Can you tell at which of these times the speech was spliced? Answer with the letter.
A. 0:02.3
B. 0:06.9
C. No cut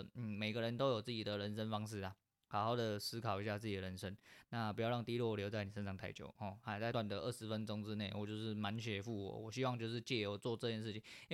B